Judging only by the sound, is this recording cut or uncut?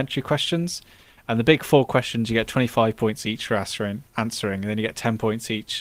uncut